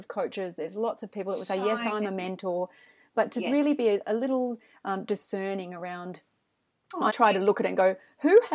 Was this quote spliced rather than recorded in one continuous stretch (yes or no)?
yes